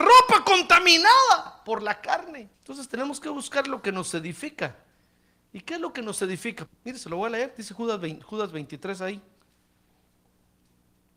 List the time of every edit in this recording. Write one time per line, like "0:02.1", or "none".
0:02.5
0:06.7

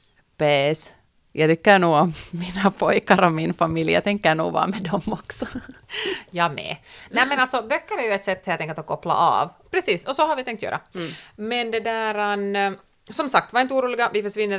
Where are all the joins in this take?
0:09.6

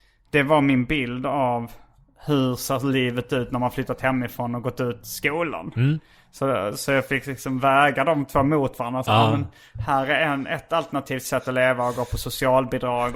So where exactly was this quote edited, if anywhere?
none

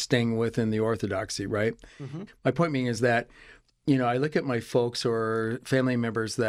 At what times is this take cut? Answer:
0:02.3

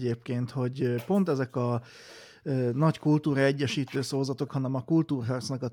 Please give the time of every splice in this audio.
0:04.5

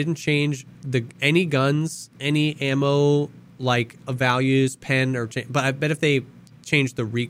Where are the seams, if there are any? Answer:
none

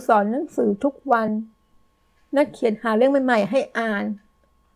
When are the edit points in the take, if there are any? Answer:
none

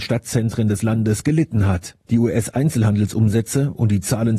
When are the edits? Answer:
0:02.0

